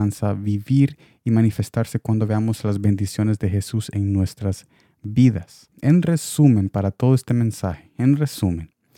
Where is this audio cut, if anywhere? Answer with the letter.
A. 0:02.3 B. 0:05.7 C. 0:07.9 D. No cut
B